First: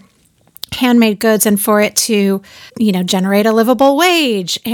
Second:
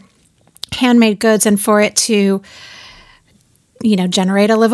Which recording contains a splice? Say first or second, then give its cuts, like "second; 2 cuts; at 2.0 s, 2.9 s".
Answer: first; 1 cut; at 2.7 s